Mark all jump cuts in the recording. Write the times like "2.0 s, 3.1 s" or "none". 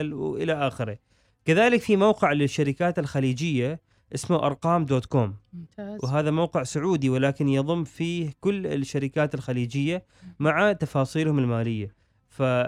none